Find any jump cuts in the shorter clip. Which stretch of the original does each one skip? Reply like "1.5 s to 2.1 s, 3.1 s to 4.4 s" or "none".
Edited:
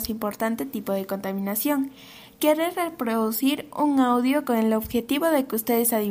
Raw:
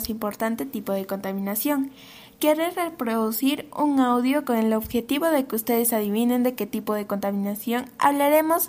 none